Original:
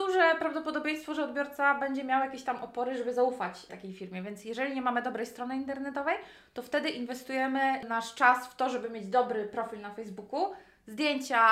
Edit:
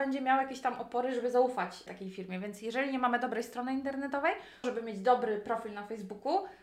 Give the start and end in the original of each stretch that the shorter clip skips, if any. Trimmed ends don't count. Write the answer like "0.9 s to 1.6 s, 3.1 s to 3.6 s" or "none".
6.5 s to 8.7 s